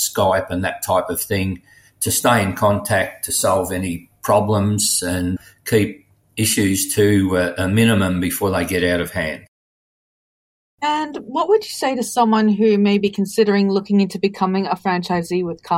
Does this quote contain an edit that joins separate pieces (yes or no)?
no